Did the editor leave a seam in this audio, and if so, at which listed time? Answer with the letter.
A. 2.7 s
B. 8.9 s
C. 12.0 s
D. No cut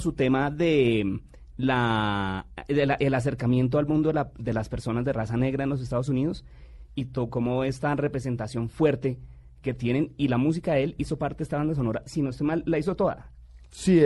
D